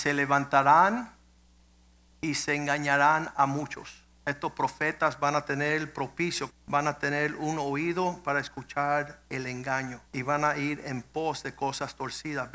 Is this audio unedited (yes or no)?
no